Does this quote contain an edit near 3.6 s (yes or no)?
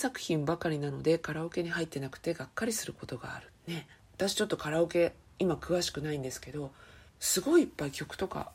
yes